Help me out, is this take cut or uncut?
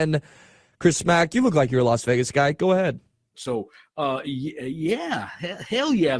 cut